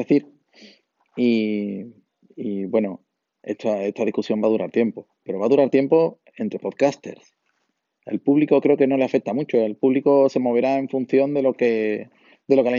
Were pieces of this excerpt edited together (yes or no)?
no